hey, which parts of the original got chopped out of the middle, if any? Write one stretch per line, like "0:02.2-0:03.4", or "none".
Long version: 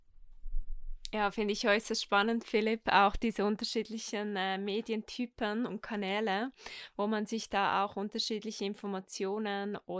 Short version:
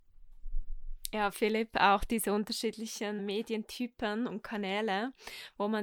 0:01.3-0:02.4
0:04.3-0:04.6